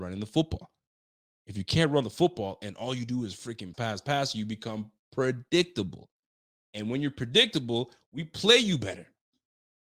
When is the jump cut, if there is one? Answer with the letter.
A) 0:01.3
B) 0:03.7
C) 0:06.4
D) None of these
B